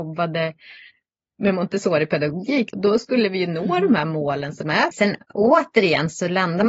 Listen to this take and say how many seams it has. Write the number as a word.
two